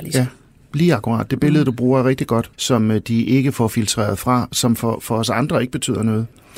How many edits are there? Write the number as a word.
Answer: one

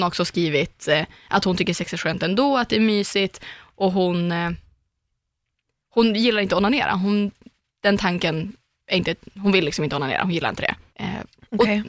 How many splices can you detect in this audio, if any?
one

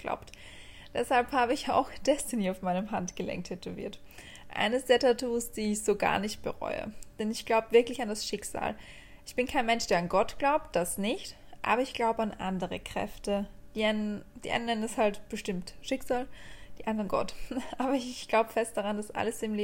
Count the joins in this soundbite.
one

